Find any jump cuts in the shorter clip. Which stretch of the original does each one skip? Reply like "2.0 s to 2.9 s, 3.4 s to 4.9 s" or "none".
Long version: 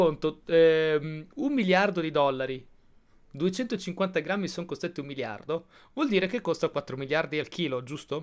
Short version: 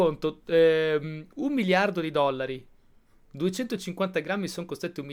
none